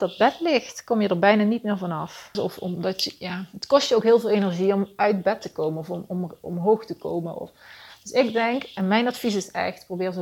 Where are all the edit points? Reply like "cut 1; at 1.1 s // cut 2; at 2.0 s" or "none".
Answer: cut 1; at 2.3 s